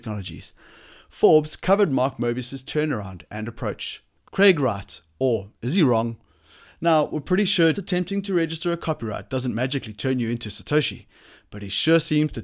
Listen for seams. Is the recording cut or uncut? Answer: cut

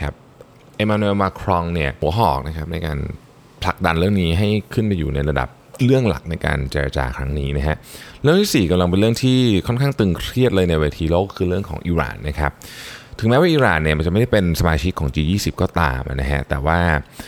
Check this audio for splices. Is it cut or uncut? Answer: cut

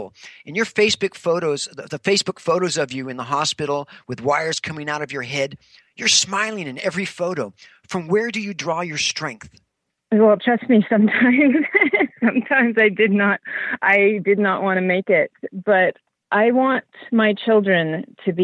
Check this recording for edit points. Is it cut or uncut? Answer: uncut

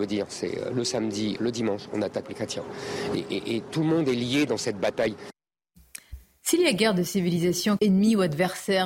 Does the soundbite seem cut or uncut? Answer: cut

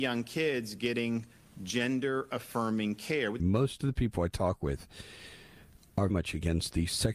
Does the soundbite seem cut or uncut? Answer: cut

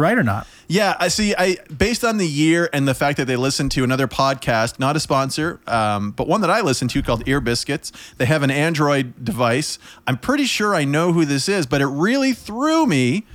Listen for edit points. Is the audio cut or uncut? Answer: uncut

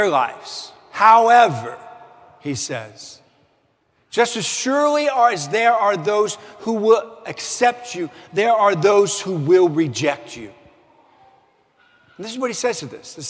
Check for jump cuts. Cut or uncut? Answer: uncut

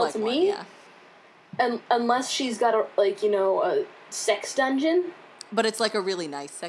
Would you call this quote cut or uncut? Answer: uncut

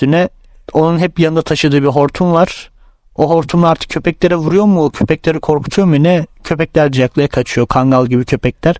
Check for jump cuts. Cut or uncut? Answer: cut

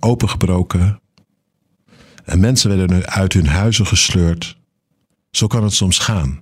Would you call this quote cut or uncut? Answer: cut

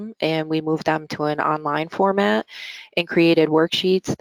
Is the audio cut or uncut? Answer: uncut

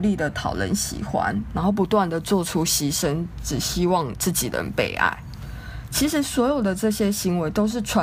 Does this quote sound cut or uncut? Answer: uncut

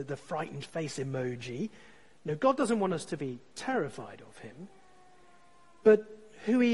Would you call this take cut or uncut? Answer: uncut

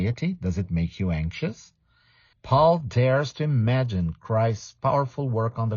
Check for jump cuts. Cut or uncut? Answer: cut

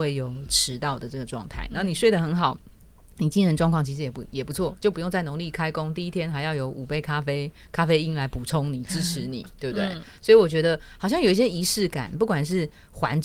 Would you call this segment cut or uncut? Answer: uncut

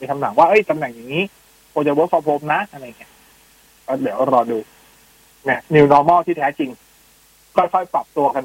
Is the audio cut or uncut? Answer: uncut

